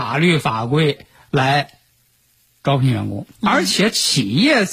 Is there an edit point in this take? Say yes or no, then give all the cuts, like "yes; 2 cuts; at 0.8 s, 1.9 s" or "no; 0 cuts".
no; 0 cuts